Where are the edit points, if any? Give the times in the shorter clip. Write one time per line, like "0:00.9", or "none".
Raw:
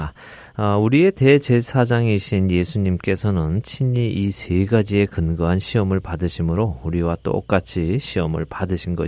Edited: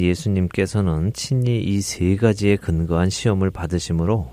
none